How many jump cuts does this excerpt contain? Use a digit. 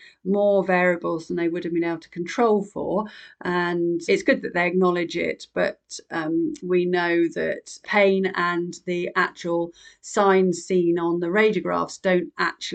3